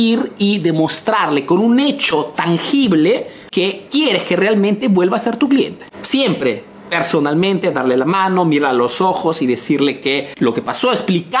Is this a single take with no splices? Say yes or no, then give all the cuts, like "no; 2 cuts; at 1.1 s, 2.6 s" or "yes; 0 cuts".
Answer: yes; 0 cuts